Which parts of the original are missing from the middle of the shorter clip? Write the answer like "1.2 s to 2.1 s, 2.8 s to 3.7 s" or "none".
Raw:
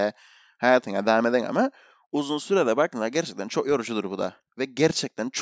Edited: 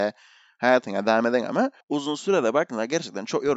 1.8 s to 2.0 s